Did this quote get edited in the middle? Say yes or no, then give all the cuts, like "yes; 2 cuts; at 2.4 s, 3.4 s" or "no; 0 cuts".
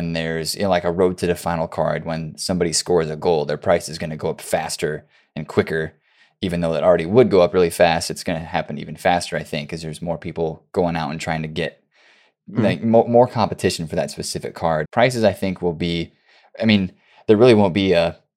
yes; 1 cut; at 14.8 s